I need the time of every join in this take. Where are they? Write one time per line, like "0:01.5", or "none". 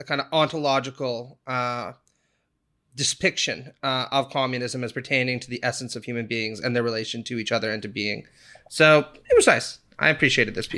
none